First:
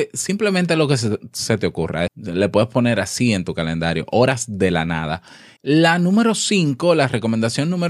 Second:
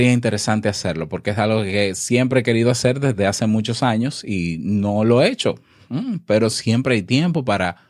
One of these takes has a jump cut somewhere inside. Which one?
first; 2 cuts; at 2.1 s, 5.6 s

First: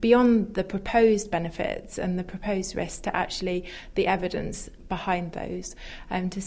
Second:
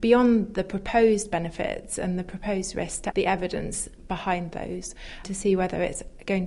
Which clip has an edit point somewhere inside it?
second; 2 cuts; at 3.1 s, 5.2 s

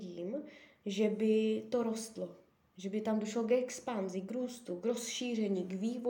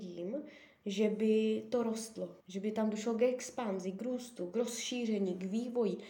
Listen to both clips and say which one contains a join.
second; 1 cut; at 2.4 s

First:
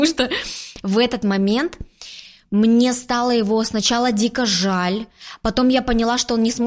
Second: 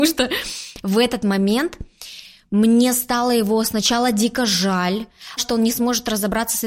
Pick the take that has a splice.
second; 1 cut; at 5.4 s

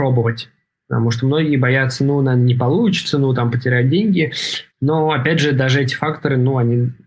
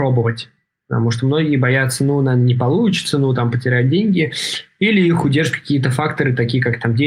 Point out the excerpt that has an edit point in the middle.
first; 1 cut; at 4.7 s

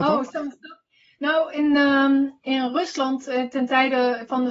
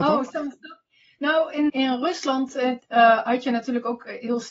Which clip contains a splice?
second; 2 cuts; at 1.7 s, 2.8 s

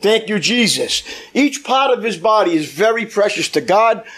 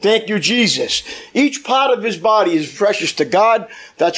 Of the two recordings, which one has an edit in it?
second; 1 cut; at 2.7 s

